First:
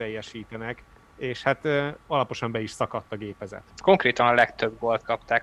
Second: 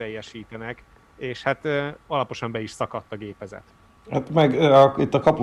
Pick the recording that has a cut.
first; 1 cut; at 3.7 s

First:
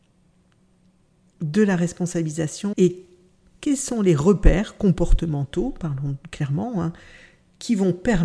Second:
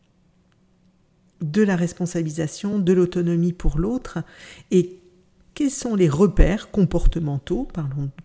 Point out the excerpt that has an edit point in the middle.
first; 1 cut; at 2.7 s

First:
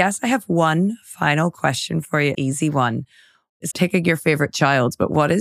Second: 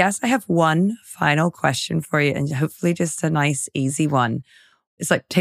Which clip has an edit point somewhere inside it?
first; 2 cuts; at 2.3 s, 3.7 s

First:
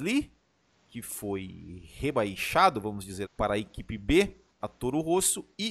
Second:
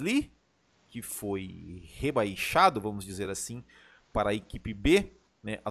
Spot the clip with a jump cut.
first; 2 cuts; at 3.2 s, 4.6 s

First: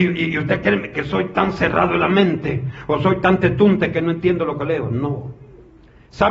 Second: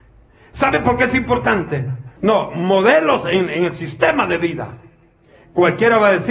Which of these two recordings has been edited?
second; 1 cut; at 2.2 s

